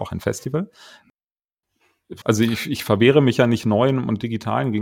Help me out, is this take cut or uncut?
cut